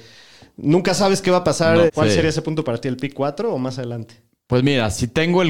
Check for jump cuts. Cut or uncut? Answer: cut